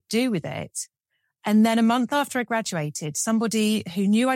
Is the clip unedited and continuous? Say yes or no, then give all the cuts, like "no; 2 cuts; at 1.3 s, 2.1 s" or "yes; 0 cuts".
yes; 0 cuts